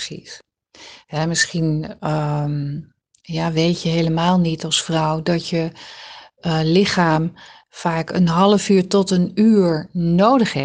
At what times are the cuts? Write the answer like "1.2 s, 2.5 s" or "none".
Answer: none